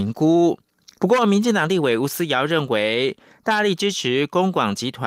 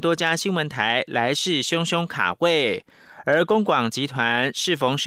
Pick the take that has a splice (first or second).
first